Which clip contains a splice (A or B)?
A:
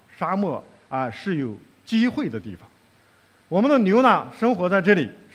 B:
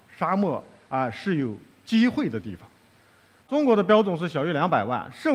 B